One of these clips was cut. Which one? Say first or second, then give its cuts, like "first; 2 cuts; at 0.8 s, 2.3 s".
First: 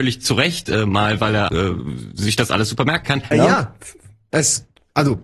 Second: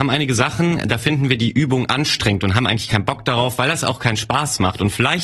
first; 2 cuts; at 1.5 s, 3.3 s